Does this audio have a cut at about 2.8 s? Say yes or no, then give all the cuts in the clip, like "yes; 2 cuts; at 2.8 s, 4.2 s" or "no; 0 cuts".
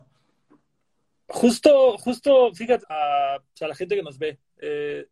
yes; 1 cut; at 2.8 s